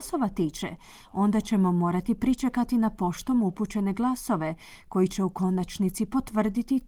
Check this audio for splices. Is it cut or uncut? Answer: uncut